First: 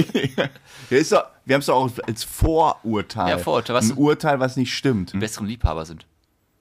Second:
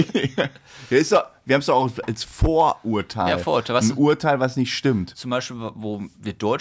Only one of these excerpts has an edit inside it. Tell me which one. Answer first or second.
first